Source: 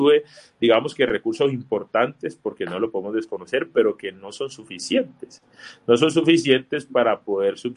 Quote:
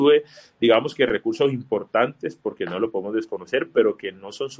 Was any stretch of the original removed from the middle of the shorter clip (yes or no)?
no